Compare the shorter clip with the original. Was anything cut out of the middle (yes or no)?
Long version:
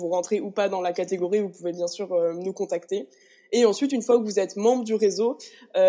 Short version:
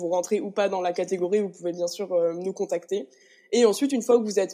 no